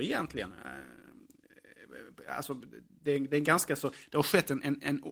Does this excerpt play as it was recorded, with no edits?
yes; 0 cuts

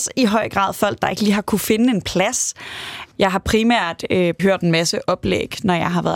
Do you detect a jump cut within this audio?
yes; 2 cuts; at 3.1 s, 4.4 s

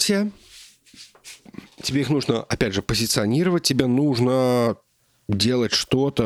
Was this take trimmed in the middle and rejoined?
no; 0 cuts

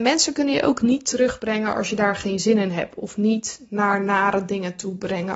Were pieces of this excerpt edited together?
no; 0 cuts

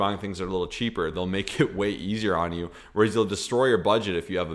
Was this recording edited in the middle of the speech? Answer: no; 0 cuts

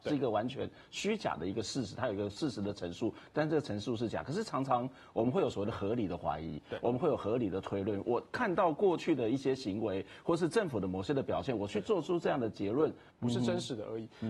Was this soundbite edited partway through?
yes; 1 cut; at 13.1 s

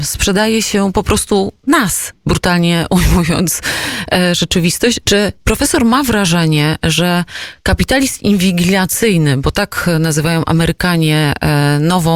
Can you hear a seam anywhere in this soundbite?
yes; 1 cut; at 5.0 s

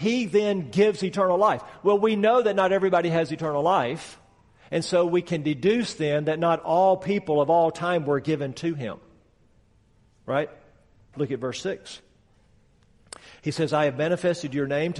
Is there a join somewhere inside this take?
yes; 1 cut; at 11.1 s

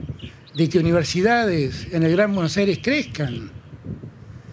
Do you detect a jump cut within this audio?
no; 0 cuts

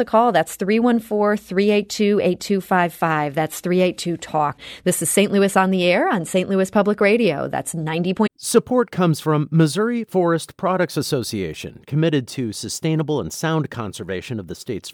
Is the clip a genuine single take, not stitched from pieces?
yes; 0 cuts

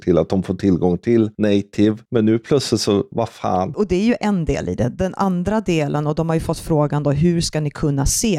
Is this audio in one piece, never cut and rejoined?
no; 1 cut; at 3.1 s

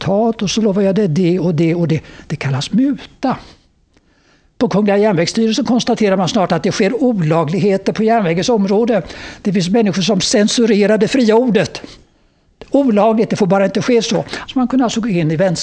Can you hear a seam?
yes; 1 cut; at 14.5 s

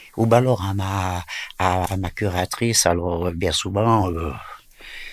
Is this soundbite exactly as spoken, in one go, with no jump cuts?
yes; 0 cuts

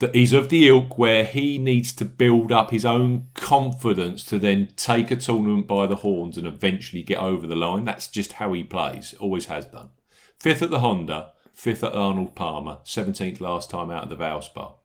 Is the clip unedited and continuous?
yes; 0 cuts

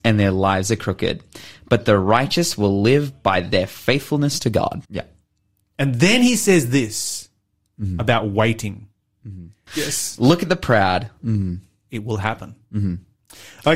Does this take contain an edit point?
yes; 3 cuts; at 4.8 s, 9.7 s, 11.2 s

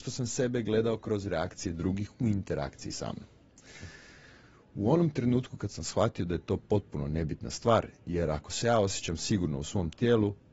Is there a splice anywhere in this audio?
no; 0 cuts

